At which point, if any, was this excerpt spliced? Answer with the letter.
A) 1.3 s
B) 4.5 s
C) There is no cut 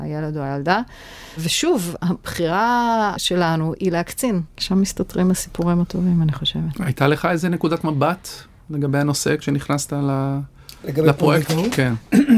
B